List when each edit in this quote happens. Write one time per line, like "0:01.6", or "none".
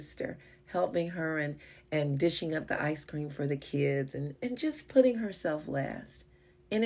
none